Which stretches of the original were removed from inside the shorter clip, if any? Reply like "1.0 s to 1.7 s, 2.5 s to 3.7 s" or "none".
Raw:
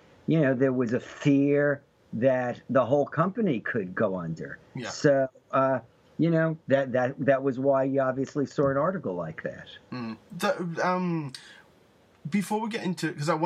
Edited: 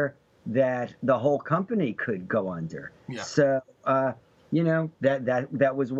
none